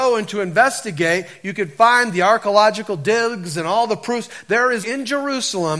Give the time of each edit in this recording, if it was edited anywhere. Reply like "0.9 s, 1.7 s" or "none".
4.8 s